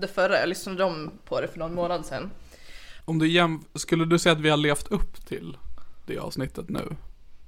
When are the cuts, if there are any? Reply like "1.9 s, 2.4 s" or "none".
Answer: 3.0 s